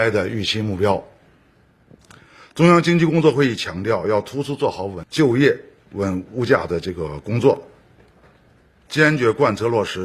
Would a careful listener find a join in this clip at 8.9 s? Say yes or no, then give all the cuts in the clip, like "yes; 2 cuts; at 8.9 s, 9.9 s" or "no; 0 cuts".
yes; 1 cut; at 8.9 s